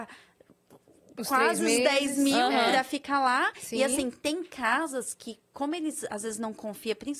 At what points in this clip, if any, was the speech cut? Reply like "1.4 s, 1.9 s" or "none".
none